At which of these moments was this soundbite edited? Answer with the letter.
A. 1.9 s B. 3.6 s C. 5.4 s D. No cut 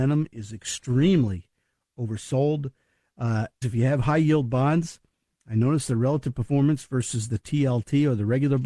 B